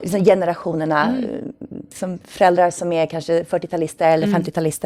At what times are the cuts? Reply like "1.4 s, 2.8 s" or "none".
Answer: none